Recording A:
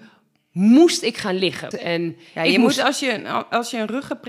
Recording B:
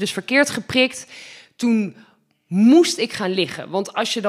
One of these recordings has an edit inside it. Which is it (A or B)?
A